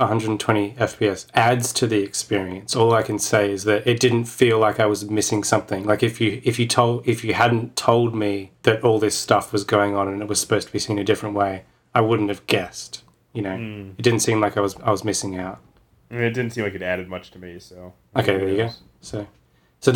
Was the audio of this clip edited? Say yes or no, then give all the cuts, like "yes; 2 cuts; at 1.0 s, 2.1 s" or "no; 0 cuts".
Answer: no; 0 cuts